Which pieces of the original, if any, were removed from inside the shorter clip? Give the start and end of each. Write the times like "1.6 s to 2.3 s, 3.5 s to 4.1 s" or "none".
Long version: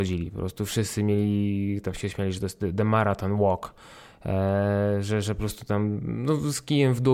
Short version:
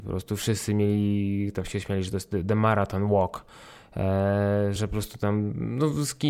5.0 s to 5.2 s